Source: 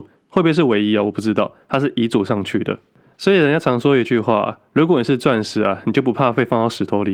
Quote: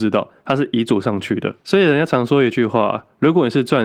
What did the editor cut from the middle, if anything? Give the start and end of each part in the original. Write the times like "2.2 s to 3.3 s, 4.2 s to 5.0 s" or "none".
2.8 s to 3.1 s